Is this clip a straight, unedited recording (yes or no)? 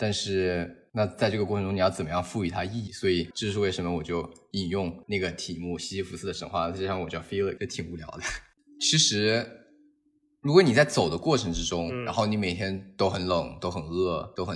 no